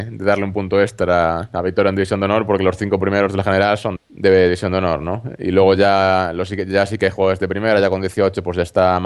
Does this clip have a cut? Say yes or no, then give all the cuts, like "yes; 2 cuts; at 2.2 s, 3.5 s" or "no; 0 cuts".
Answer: yes; 1 cut; at 4.0 s